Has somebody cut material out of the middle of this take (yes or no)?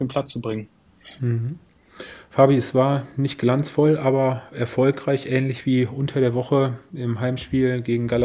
no